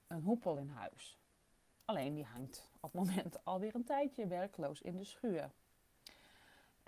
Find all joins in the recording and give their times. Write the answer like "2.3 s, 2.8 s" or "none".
none